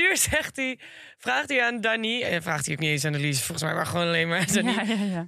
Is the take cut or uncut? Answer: uncut